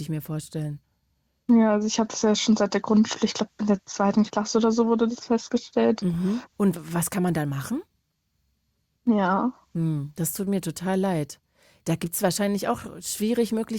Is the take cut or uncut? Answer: cut